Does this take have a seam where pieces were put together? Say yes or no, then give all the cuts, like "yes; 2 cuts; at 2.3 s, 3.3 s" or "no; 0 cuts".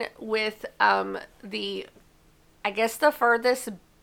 no; 0 cuts